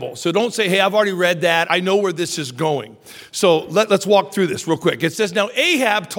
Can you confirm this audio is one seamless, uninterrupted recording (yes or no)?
no